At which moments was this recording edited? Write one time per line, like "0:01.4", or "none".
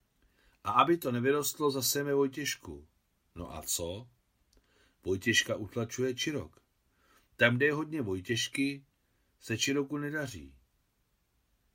none

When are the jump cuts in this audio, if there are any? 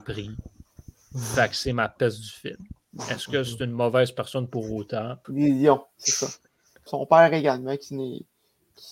0:05.2
0:06.9

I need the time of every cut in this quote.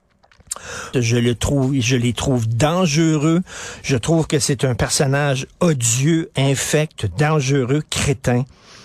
0:00.9

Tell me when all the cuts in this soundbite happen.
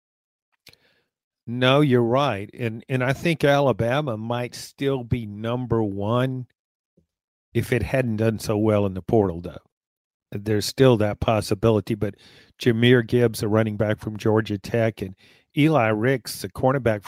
none

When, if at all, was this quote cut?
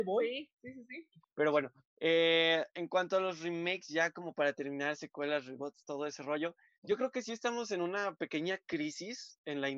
0:01.2

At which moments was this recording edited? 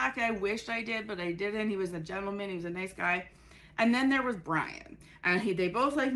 none

